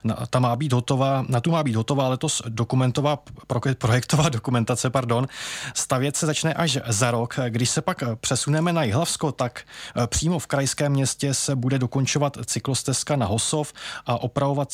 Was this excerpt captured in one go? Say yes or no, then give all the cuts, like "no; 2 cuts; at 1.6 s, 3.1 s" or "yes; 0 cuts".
yes; 0 cuts